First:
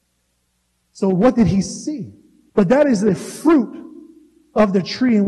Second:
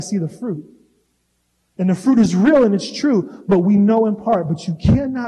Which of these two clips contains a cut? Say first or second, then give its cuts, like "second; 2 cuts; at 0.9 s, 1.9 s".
first; 1 cut; at 2.5 s